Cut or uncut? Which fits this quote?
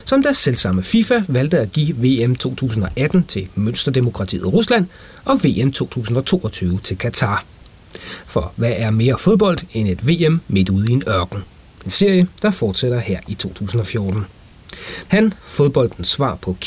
cut